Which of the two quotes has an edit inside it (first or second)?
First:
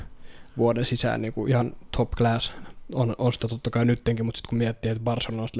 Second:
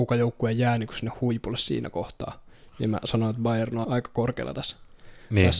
second